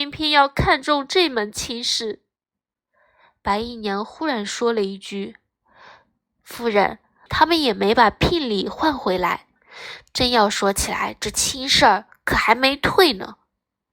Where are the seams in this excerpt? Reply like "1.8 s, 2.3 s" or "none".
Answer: 7.3 s